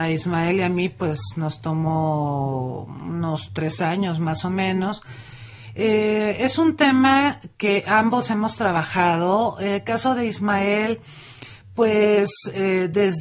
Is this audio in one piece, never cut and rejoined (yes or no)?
yes